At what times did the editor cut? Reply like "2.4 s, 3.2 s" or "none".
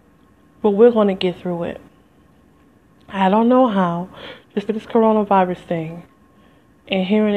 4.7 s